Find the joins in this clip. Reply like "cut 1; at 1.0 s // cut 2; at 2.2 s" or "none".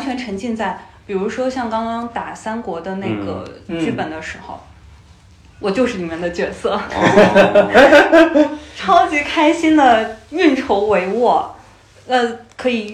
none